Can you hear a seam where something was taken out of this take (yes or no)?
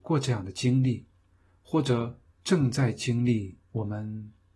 yes